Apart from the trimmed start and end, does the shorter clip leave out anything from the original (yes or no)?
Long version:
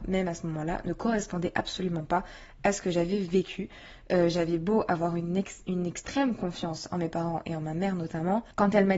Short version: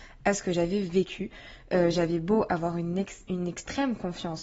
no